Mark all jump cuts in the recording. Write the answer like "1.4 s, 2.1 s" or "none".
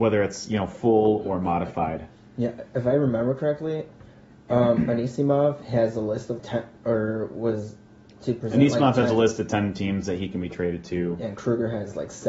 6.4 s